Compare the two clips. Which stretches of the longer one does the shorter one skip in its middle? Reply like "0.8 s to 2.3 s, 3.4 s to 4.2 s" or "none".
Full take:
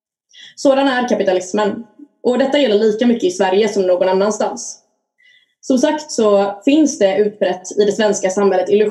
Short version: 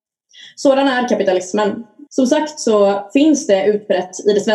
2.1 s to 5.6 s

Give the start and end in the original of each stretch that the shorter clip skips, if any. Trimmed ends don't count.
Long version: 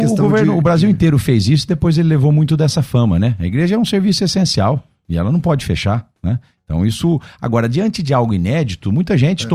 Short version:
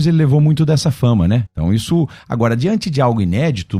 3.4 s to 6.6 s

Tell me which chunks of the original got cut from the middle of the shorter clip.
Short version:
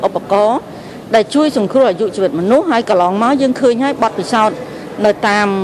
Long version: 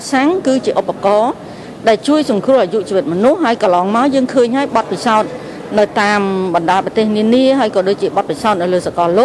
none

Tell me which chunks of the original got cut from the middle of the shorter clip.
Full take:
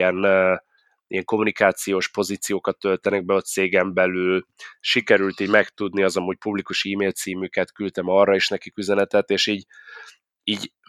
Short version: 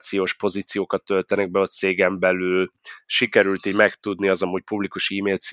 none

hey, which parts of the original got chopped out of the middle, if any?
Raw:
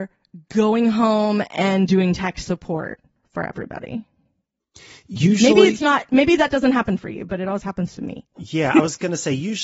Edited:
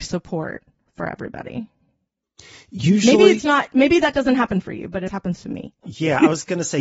7.4 s to 7.6 s

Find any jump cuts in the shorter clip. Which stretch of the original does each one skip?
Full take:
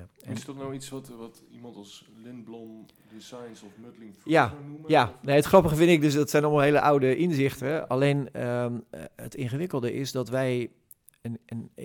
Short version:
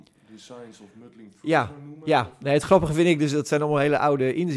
none

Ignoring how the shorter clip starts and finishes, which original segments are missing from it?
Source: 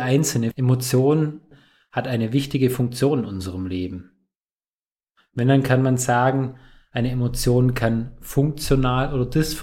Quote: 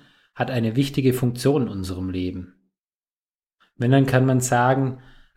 none

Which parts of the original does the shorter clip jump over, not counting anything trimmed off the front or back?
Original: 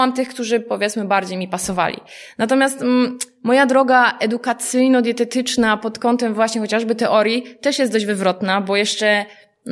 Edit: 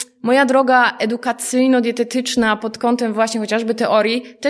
none

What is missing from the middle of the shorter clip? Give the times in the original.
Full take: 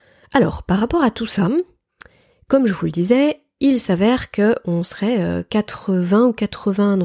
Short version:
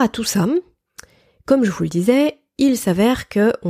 none

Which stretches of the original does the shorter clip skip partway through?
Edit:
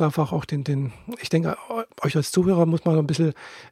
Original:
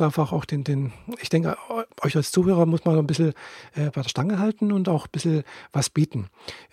none

